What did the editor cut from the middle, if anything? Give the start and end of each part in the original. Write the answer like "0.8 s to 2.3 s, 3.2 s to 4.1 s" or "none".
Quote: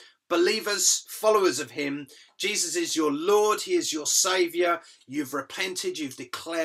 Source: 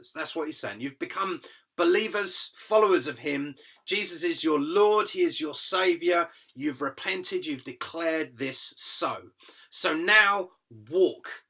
none